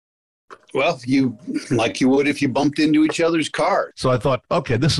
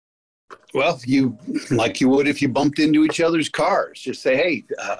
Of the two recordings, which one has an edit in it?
first; 1 cut; at 3.9 s

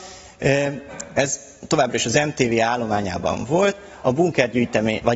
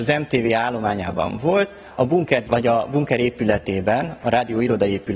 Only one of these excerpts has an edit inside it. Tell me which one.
second; 1 cut; at 2.4 s

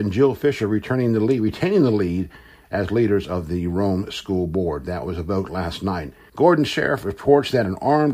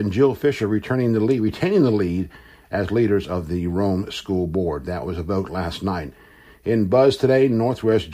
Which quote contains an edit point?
first; 1 cut; at 6.3 s

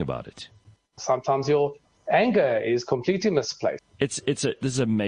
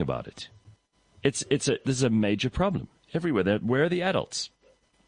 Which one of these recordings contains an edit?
first; 2 cuts; at 1.0 s, 3.8 s

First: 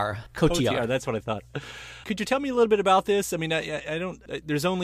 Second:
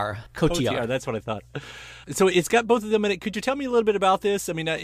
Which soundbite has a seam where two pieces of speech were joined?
first; 1 cut; at 2.0 s

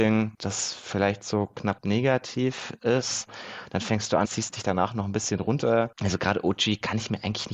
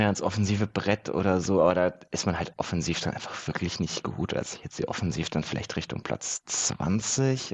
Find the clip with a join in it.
first; 1 cut; at 4.2 s

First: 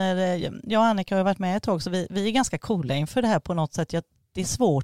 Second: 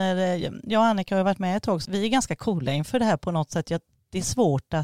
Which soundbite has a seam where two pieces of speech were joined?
second; 1 cut; at 1.9 s

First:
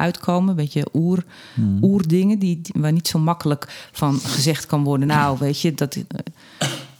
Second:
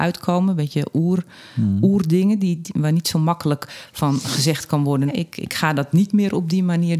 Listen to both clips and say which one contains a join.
second; 1 cut; at 5.1 s

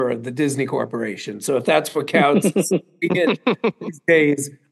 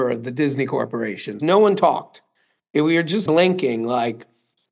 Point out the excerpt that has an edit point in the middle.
second; 2 cuts; at 1.4 s, 3.3 s

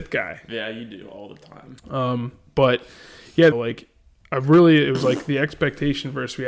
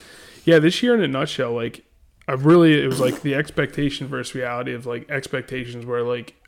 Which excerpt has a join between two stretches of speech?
first; 2 cuts; at 1.8 s, 3.5 s

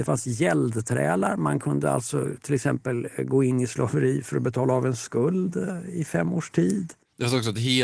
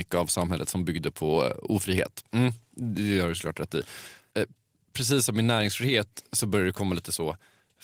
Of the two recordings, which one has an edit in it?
second; 2 cuts; at 2.3 s, 4.3 s

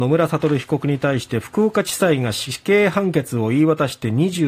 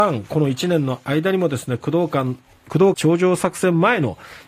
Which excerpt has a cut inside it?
second; 1 cut; at 2.9 s

